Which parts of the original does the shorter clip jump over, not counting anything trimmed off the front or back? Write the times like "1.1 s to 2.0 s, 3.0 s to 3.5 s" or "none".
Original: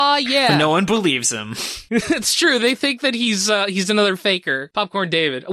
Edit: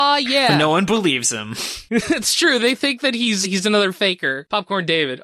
3.4 s to 3.7 s